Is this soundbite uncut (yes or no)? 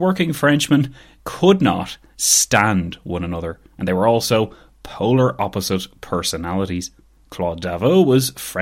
no